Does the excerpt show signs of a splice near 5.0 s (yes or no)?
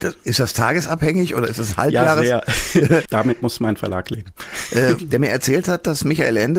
yes